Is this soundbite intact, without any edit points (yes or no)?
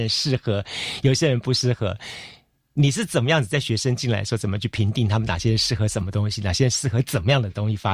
yes